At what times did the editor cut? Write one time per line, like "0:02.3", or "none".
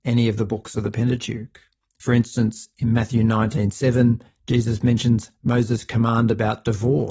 none

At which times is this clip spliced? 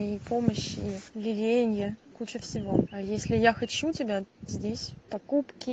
0:04.5

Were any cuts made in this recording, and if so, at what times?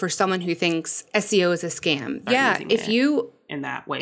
0:02.3

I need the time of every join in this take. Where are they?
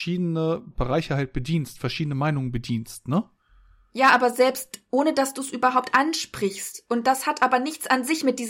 none

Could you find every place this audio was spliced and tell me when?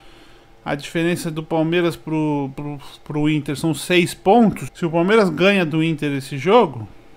0:02.5
0:04.7

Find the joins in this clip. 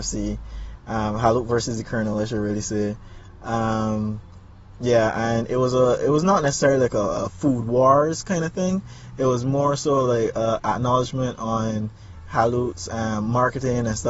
none

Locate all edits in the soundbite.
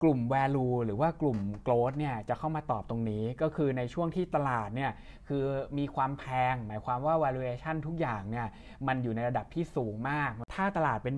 none

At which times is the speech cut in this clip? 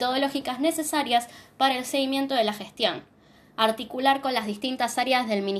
none

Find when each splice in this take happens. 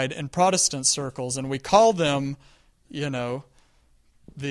none

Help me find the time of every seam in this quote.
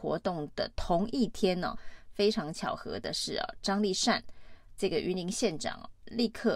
none

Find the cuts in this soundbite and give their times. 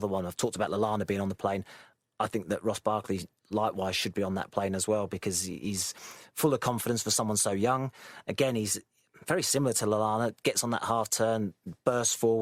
none

